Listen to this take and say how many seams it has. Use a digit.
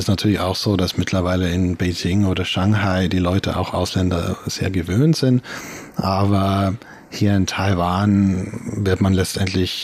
0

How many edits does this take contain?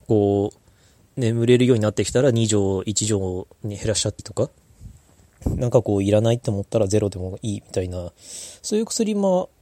1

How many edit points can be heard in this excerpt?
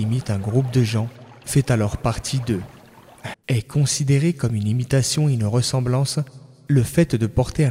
1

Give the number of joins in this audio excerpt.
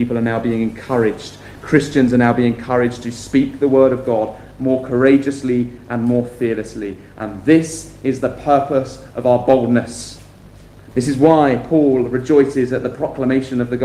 1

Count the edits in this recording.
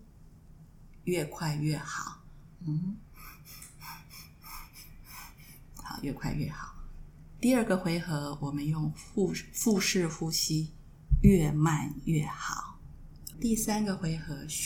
1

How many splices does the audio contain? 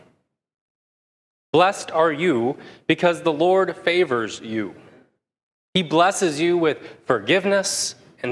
0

